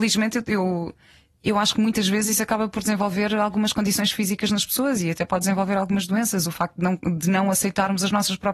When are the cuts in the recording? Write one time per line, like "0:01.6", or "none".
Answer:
none